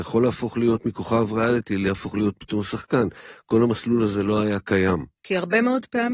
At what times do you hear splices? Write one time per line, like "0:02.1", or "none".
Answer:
0:05.2